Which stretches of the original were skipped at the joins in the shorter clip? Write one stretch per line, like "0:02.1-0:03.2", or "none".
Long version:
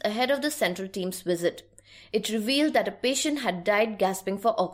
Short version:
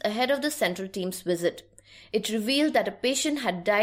none